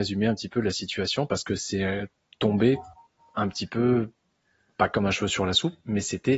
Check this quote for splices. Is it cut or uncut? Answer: uncut